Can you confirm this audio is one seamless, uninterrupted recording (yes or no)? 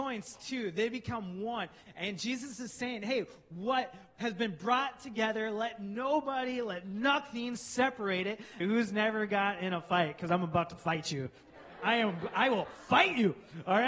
no